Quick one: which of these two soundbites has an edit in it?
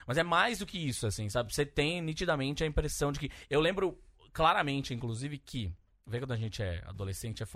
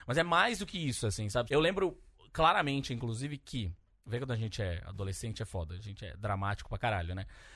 second; 1 cut; at 1.5 s

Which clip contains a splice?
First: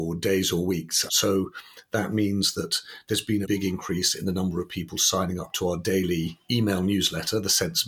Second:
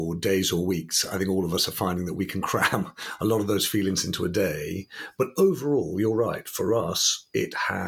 first; 2 cuts; at 1.1 s, 3.4 s

